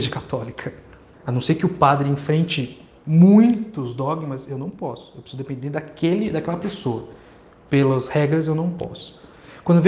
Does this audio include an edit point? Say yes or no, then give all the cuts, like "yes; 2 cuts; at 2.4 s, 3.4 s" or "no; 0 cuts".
yes; 1 cut; at 1.1 s